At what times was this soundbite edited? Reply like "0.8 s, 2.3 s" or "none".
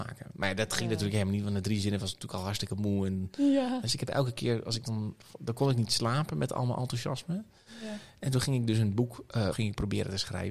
3.8 s, 9.5 s